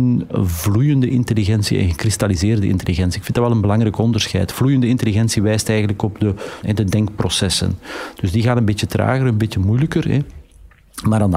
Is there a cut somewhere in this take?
yes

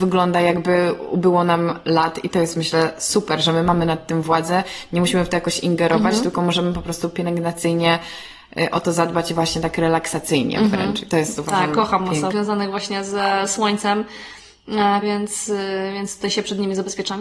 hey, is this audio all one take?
no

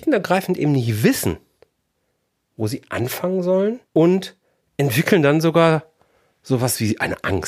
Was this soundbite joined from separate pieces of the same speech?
yes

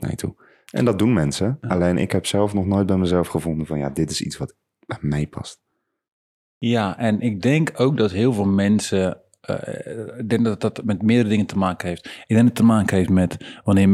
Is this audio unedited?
yes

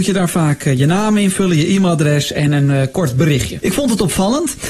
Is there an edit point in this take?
yes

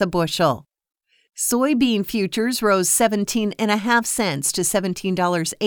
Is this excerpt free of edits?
yes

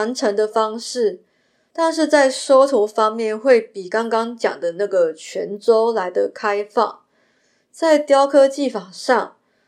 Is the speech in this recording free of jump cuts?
yes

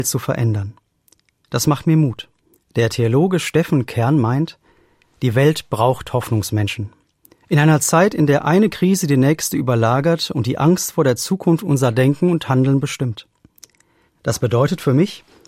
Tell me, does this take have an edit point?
yes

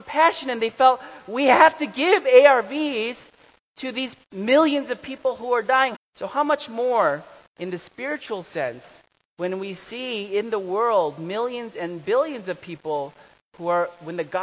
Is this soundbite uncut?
no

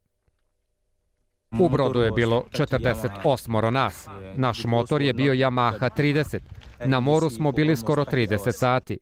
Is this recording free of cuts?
no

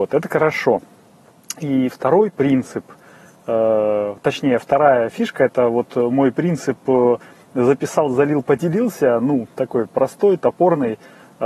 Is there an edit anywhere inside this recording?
no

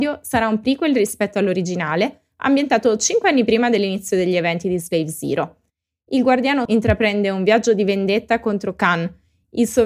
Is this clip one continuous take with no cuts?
no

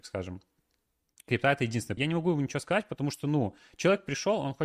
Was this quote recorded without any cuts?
no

